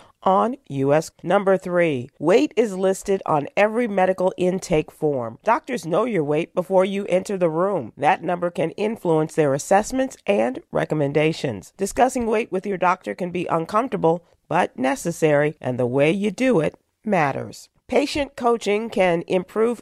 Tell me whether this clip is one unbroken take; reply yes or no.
no